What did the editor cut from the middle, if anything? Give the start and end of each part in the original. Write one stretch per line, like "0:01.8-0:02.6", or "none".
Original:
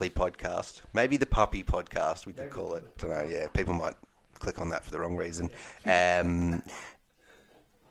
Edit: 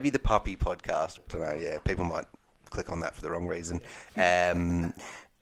0:02.2-0:02.9

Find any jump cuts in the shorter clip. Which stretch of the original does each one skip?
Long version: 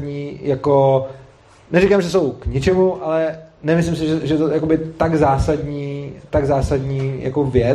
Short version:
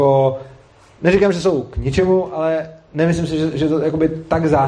none

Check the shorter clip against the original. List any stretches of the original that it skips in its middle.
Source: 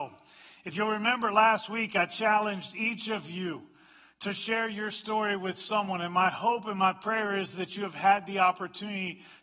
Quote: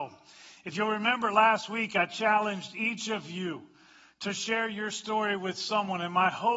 none

